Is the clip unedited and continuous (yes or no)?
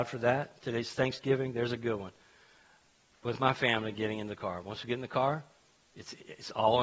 yes